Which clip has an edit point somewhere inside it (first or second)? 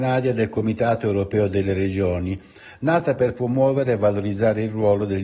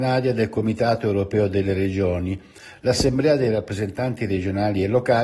first